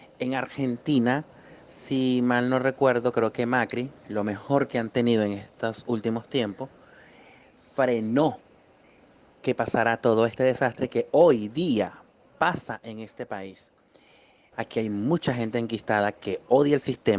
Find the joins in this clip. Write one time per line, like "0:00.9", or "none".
0:14.5